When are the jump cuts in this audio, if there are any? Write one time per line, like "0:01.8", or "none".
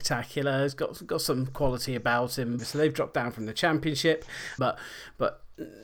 0:02.6
0:04.6